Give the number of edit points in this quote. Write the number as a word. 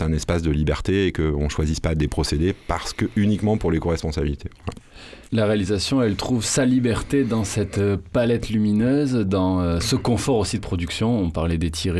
one